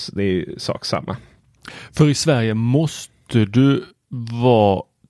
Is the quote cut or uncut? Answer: uncut